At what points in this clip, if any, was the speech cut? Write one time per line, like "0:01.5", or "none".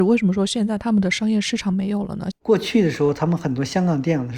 0:02.3